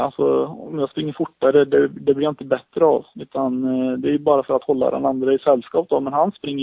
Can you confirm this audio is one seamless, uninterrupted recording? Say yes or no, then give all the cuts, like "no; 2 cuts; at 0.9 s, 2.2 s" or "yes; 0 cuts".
yes; 0 cuts